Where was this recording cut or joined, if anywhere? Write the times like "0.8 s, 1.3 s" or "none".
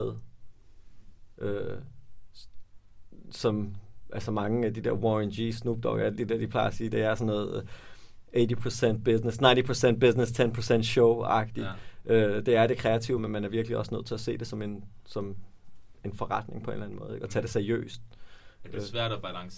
13.2 s